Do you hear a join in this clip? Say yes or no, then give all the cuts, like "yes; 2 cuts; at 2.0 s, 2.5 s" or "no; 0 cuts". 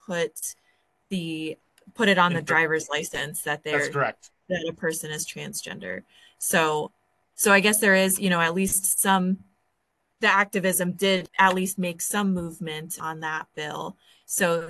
no; 0 cuts